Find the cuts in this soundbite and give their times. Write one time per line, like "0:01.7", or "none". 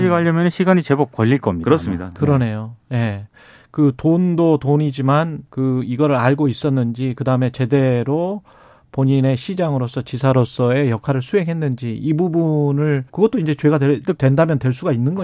0:05.5
0:13.1